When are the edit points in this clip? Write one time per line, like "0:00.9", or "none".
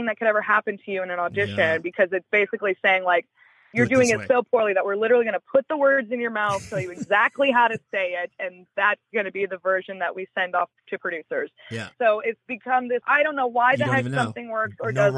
0:11.9
0:13.0